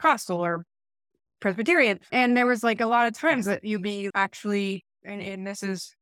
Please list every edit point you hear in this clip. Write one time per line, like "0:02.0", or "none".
0:02.1
0:04.1

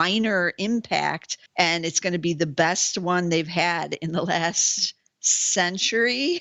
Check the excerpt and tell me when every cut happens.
0:01.5

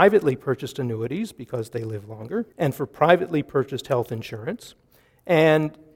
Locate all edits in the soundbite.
0:02.5

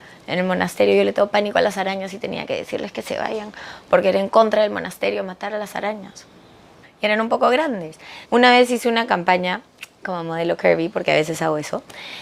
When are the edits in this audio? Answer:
0:06.8
0:08.2

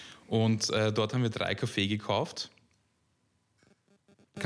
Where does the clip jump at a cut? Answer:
none

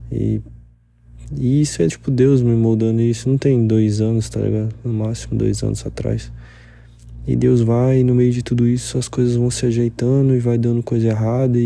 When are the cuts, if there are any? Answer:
none

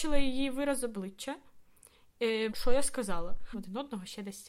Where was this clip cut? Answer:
0:02.5
0:03.5

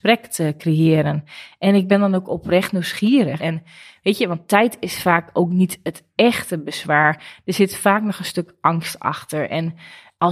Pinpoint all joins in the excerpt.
0:03.4

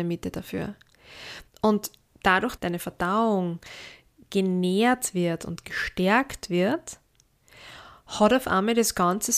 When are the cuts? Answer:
0:01.5
0:02.6

